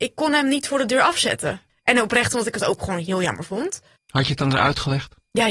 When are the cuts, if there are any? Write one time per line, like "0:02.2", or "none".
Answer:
0:01.7
0:04.0